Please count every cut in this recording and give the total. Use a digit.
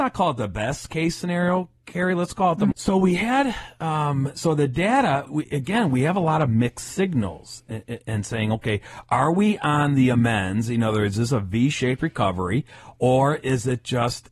2